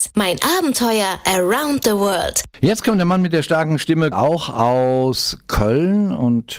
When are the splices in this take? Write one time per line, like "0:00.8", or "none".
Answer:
0:02.5
0:04.1